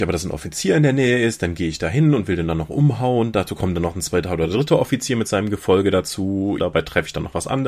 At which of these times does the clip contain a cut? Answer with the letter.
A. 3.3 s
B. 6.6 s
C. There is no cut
B